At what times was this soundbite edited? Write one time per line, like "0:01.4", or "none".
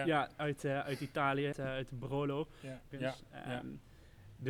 0:01.5
0:02.9